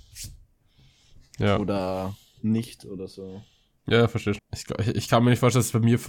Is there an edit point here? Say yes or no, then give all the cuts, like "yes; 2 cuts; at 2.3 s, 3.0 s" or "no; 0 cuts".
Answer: yes; 1 cut; at 4.4 s